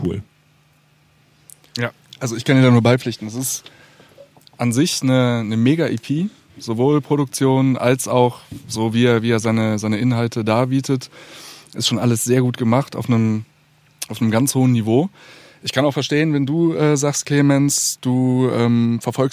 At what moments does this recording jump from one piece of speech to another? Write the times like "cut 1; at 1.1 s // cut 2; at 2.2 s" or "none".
none